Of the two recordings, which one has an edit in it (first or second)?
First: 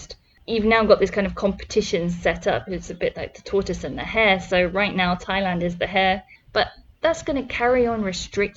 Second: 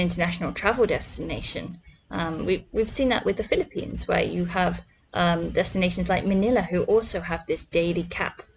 first